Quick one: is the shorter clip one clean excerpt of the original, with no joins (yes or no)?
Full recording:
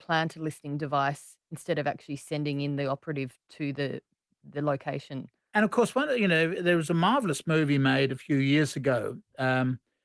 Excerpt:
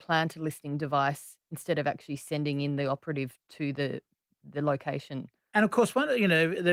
yes